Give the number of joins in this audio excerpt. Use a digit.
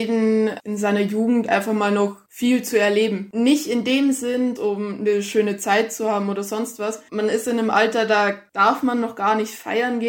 2